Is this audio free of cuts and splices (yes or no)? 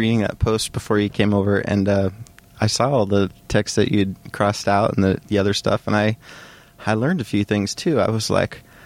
yes